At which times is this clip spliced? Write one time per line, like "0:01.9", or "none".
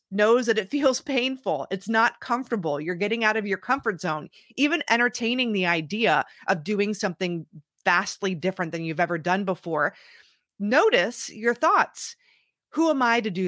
none

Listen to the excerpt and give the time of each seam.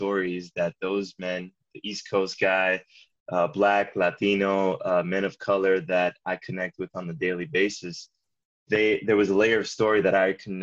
0:03.2

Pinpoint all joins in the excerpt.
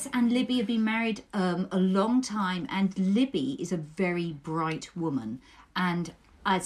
none

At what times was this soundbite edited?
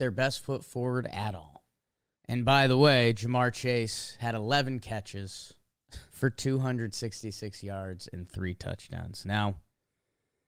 0:02.2
0:06.1

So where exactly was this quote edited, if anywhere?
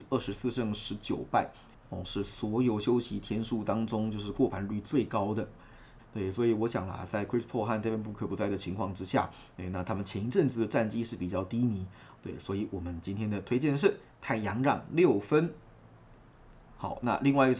0:06.0
0:12.2

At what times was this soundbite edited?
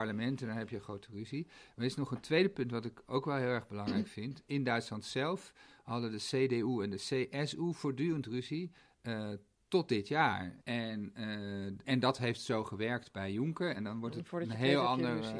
0:10.6
0:11.8
0:13.8

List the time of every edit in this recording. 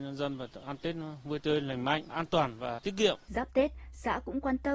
0:03.3

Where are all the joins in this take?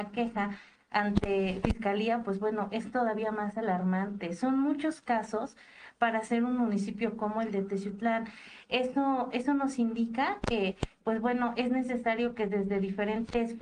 none

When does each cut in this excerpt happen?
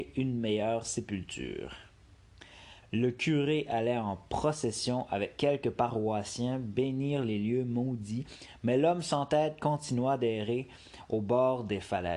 0:02.8

